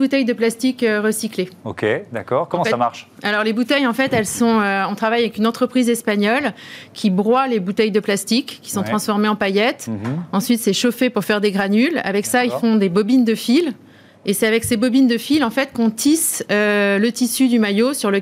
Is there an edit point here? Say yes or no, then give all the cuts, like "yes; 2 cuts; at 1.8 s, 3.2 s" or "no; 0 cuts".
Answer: no; 0 cuts